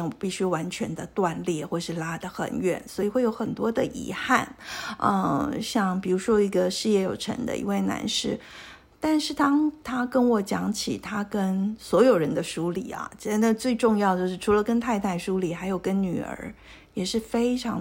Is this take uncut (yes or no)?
yes